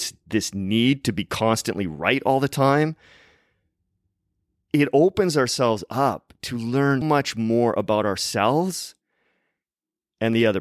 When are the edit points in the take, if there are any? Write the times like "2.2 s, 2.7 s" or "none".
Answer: 7.0 s